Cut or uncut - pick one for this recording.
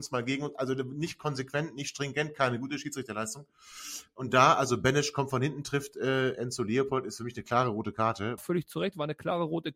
cut